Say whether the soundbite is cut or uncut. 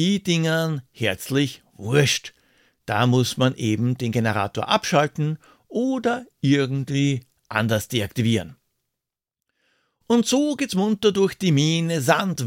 uncut